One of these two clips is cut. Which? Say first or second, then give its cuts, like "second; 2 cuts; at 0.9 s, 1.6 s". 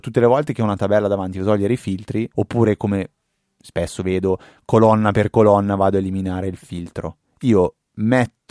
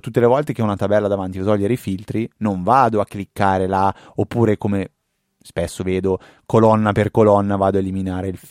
first; 1 cut; at 2.3 s